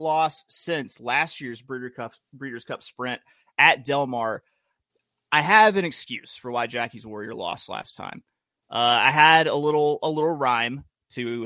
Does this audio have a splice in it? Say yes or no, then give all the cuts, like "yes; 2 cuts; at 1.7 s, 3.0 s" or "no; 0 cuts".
no; 0 cuts